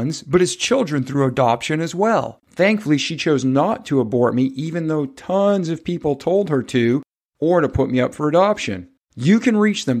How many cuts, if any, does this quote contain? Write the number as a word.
two